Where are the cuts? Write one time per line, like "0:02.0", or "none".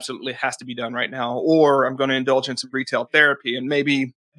none